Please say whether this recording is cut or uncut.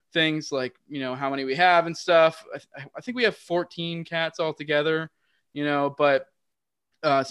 uncut